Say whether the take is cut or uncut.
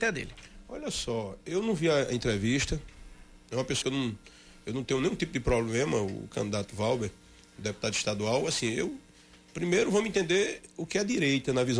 cut